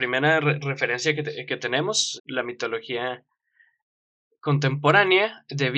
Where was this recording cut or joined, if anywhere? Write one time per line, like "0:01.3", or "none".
0:02.2